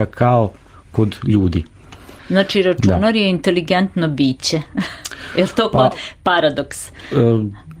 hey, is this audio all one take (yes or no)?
no